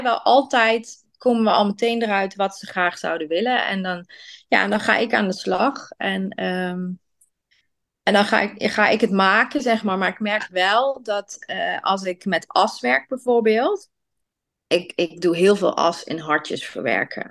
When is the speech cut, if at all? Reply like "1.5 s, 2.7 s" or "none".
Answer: none